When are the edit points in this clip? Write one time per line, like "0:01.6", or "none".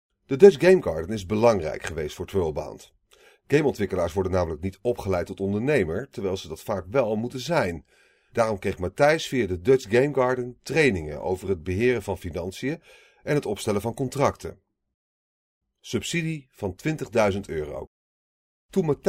none